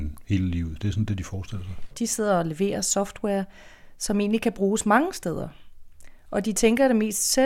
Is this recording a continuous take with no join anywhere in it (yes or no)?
no